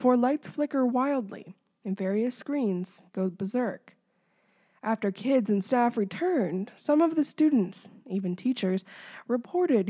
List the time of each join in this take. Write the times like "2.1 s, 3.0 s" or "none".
none